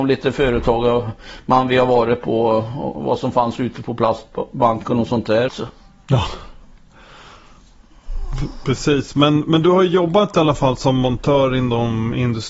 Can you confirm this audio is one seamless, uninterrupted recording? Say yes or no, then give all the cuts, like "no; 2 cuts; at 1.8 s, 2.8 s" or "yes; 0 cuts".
no; 1 cut; at 5.5 s